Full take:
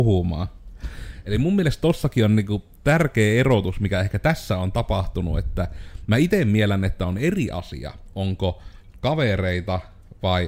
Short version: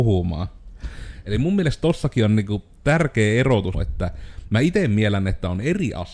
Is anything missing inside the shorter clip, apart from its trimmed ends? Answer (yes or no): yes